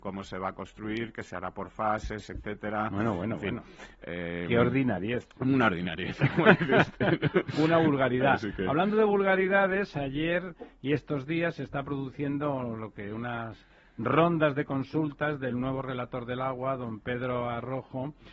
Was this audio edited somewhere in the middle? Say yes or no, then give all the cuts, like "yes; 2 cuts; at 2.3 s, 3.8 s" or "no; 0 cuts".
no; 0 cuts